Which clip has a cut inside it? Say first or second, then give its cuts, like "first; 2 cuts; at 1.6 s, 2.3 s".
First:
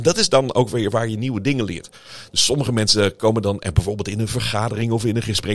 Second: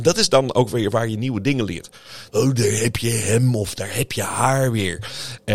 second; 1 cut; at 2.3 s